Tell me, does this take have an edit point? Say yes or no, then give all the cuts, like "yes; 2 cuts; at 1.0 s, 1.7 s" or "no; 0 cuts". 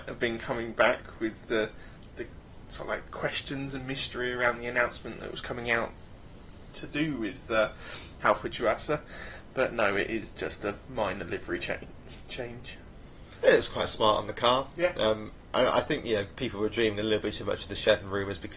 no; 0 cuts